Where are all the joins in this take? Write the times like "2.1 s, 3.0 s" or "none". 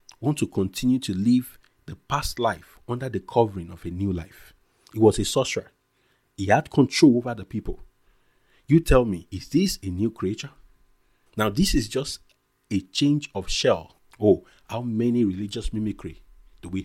11.3 s, 14.1 s